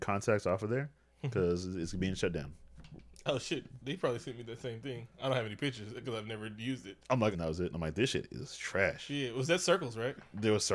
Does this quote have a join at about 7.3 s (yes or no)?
yes